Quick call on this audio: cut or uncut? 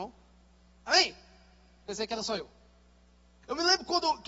uncut